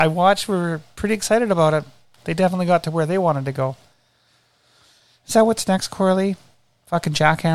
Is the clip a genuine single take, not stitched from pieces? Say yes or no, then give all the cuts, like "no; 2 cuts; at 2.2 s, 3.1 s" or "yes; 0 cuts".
yes; 0 cuts